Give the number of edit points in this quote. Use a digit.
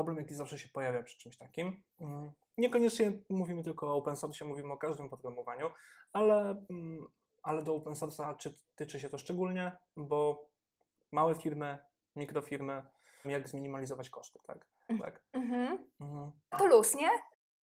3